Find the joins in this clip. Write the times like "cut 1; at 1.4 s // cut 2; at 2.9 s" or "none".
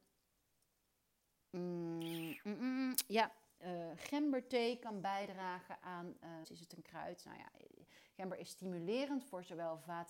cut 1; at 6.4 s